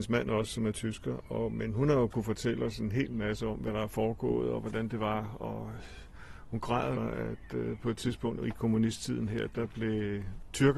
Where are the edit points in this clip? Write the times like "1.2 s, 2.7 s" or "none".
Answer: 7.0 s